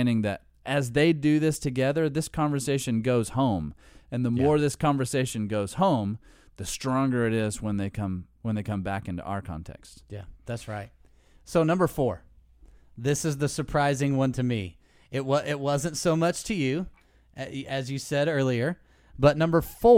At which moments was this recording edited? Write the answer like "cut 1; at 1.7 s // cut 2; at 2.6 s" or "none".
none